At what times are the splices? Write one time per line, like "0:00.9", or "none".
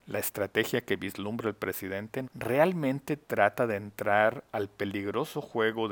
0:02.2